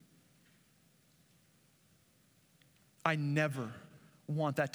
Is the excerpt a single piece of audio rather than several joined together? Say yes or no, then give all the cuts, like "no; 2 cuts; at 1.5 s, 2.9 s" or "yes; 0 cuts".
yes; 0 cuts